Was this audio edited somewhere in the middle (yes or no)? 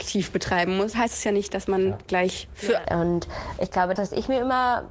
yes